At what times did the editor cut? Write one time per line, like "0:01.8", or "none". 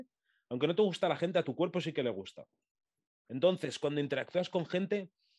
none